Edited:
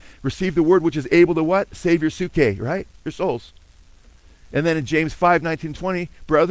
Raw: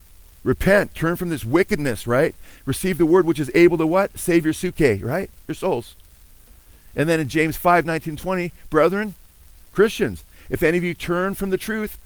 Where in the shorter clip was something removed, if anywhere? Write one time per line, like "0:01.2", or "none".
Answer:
none